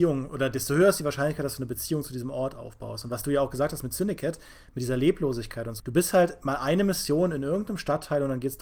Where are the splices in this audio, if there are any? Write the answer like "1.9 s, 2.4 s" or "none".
5.8 s